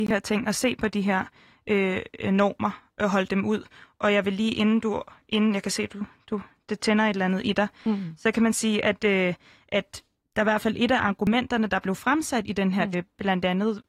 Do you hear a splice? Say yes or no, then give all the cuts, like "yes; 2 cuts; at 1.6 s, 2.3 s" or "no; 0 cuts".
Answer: yes; 1 cut; at 12.9 s